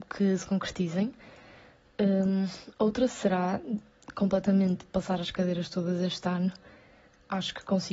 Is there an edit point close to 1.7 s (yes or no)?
no